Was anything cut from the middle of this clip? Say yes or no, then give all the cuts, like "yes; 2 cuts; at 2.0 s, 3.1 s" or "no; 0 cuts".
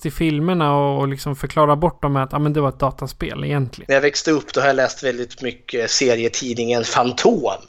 yes; 1 cut; at 3.9 s